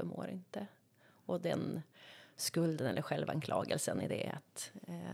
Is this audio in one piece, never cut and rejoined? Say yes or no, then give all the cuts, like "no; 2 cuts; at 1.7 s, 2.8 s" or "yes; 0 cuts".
yes; 0 cuts